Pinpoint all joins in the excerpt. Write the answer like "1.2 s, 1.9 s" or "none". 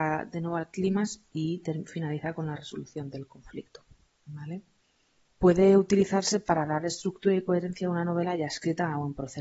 5.3 s